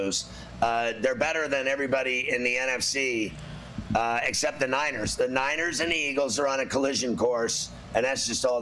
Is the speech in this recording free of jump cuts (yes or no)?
yes